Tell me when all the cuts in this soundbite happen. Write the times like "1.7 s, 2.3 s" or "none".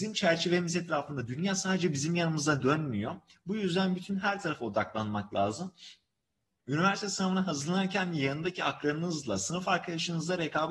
none